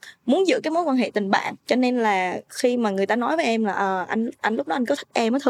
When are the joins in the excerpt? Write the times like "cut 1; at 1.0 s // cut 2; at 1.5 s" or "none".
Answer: cut 1; at 1.6 s